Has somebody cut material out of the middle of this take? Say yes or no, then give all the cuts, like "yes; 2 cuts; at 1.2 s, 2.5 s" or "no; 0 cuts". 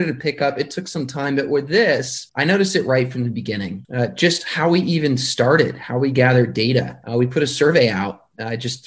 no; 0 cuts